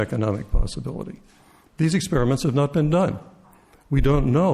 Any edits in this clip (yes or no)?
no